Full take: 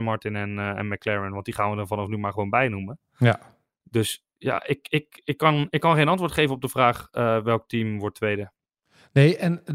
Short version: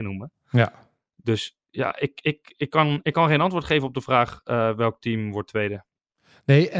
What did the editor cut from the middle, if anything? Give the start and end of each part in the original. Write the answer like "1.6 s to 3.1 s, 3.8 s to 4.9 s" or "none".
none